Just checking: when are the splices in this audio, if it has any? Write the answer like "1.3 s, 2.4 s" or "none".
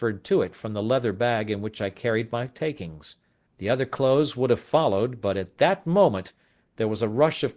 3.5 s